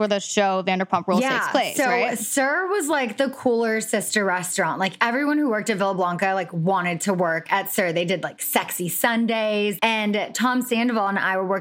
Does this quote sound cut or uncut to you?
cut